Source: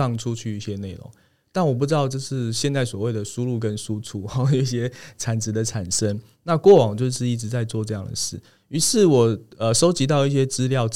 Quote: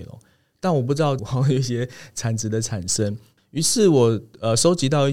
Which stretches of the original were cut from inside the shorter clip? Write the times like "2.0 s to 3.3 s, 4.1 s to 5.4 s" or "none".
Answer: 2.1 s to 4.2 s, 6.4 s to 8.6 s